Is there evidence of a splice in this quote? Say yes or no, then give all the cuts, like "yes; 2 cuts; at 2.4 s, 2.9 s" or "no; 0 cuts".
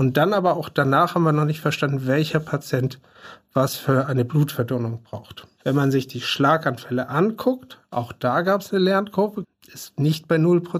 yes; 1 cut; at 9.4 s